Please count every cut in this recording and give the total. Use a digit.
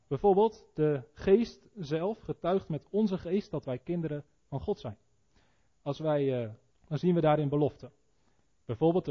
1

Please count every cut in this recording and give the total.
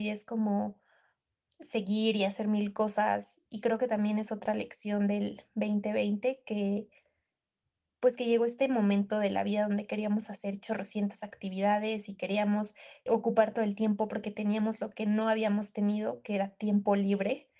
2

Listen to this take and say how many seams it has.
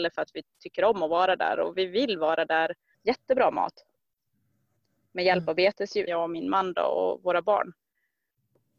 2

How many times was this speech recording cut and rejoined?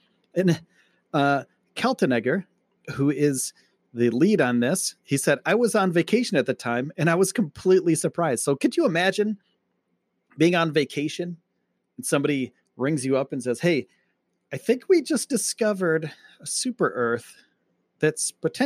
0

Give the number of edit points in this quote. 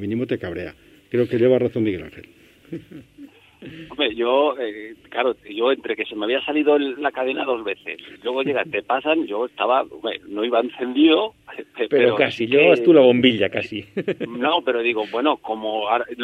1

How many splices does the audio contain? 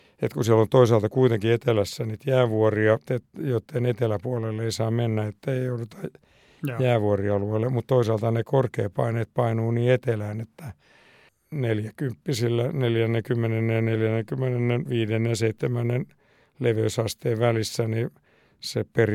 1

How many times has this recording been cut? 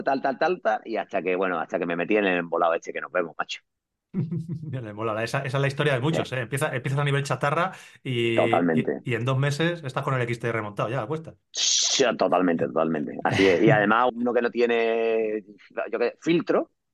1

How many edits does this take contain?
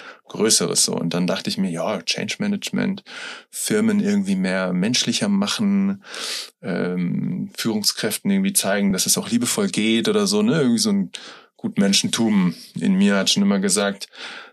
0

